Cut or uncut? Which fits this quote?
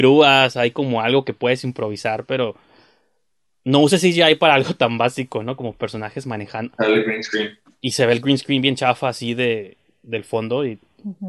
cut